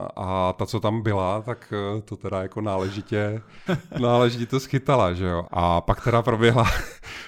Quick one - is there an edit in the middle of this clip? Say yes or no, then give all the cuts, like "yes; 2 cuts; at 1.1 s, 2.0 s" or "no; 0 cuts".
yes; 2 cuts; at 3.7 s, 5.4 s